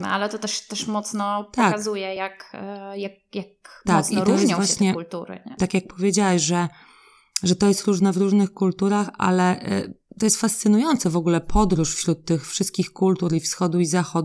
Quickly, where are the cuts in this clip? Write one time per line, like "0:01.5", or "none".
none